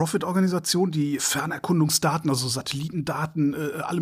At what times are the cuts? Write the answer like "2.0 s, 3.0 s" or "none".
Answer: 1.2 s